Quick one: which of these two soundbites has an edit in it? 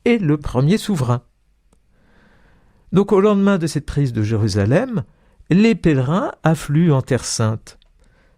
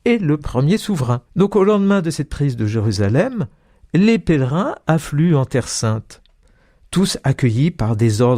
second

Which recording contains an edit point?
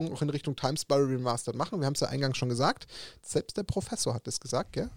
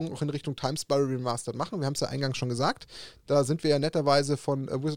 first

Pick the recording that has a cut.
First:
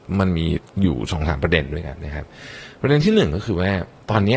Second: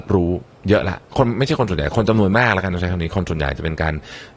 first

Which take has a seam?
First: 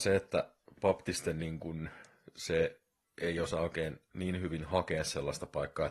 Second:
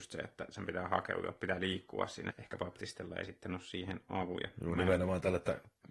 second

